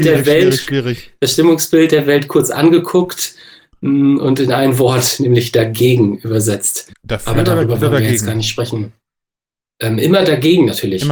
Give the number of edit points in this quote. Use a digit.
1